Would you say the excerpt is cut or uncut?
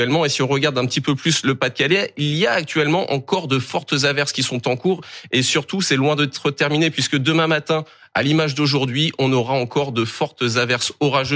uncut